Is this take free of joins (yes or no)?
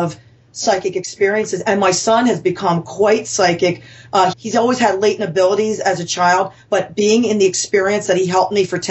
no